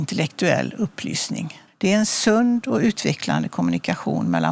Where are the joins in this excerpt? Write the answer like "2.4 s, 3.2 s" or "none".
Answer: 1.7 s